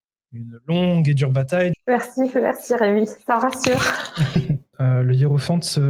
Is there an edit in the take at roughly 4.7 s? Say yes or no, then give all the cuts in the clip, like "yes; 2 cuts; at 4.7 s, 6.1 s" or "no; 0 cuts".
yes; 2 cuts; at 1.7 s, 4.7 s